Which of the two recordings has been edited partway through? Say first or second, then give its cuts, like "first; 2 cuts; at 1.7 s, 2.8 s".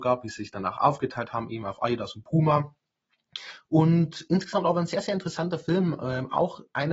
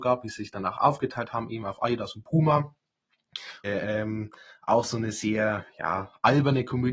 second; 1 cut; at 3.6 s